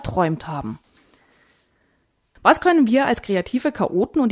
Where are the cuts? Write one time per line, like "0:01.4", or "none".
none